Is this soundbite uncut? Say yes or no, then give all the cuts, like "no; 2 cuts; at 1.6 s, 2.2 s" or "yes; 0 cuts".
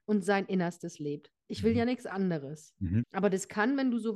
no; 1 cut; at 3.0 s